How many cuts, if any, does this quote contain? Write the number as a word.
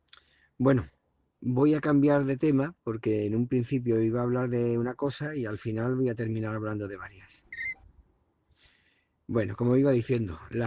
one